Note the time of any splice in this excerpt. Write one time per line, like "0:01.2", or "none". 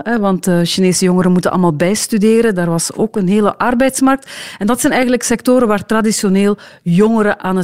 none